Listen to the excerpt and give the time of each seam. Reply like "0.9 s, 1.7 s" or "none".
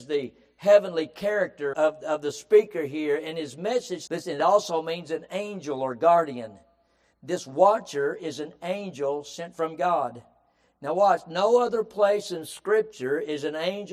1.7 s, 4.1 s